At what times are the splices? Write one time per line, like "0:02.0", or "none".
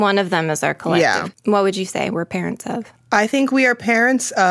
0:01.3